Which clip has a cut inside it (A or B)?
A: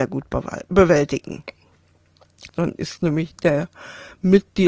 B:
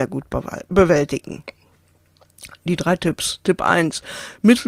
A